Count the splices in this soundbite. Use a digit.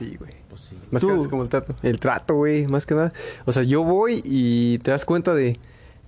0